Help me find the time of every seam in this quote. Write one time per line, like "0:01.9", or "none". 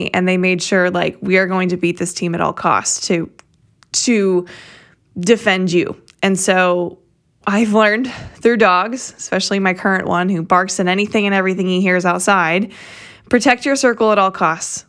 none